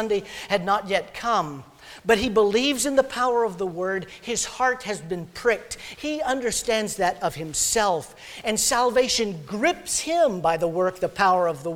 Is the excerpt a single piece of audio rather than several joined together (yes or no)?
no